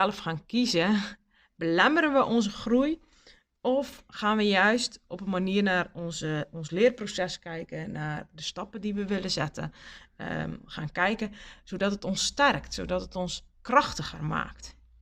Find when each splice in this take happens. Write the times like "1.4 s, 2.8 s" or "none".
none

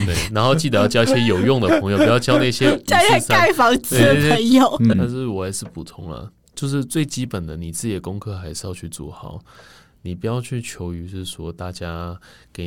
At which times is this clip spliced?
4.9 s

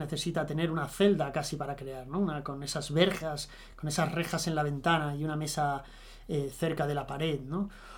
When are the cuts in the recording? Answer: none

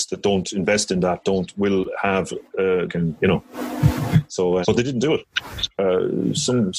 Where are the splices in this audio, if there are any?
2.9 s, 4.6 s

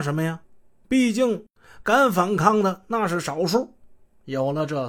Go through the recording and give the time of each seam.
none

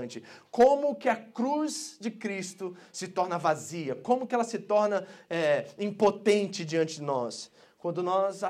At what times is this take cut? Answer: none

